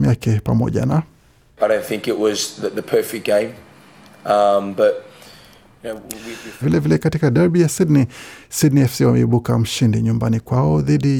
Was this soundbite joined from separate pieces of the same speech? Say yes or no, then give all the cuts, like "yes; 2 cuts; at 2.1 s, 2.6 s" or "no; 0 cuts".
yes; 1 cut; at 6.6 s